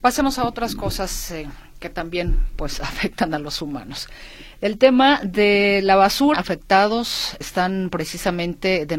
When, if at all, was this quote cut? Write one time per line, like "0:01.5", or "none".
0:06.3
0:07.4